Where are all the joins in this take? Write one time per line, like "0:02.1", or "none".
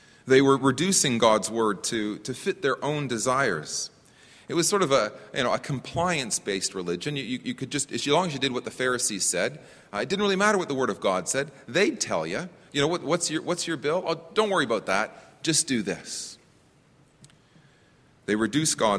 none